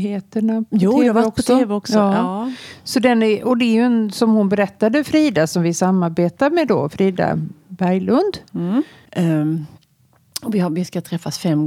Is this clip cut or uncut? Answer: cut